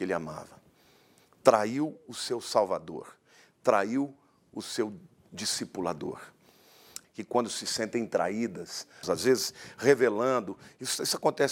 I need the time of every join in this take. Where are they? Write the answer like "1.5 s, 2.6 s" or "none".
7.0 s, 9.0 s